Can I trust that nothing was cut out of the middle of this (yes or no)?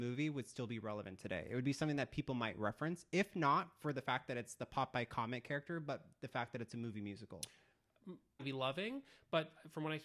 no